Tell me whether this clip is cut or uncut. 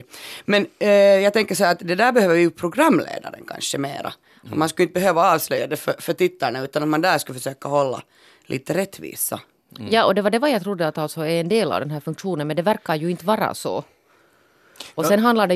uncut